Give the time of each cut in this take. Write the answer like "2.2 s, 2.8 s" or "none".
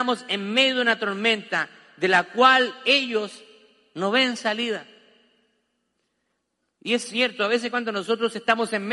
none

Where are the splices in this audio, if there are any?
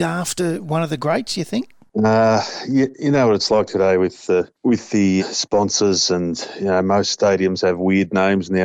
5.2 s

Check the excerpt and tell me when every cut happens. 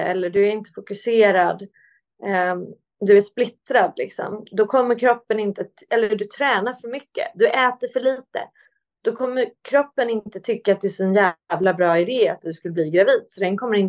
none

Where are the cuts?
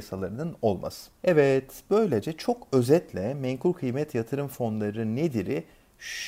1.2 s

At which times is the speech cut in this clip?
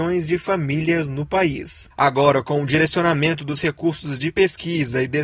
1.9 s

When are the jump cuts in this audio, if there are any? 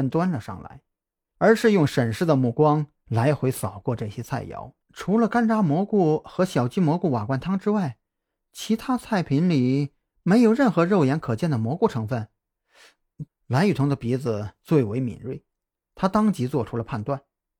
1.3 s, 4.8 s, 13.3 s

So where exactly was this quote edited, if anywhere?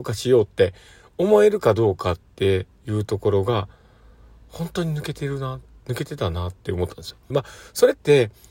7.3 s

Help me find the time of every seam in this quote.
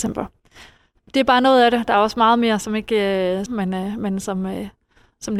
3.5 s

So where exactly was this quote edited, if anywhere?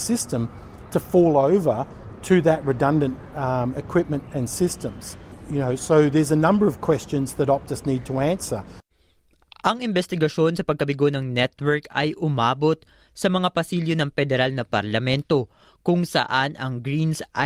none

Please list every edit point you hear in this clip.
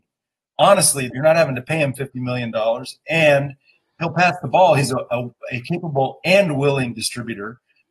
1.1 s

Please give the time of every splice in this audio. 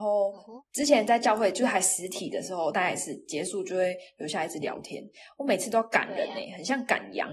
2.7 s

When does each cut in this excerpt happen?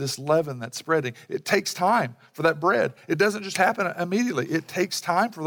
none

